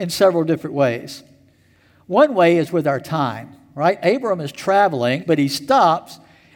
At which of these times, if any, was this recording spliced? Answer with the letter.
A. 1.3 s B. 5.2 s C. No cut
B